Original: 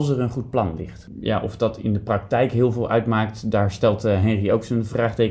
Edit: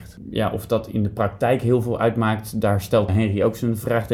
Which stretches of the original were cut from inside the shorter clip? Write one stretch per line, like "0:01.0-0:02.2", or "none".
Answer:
0:04.0-0:04.2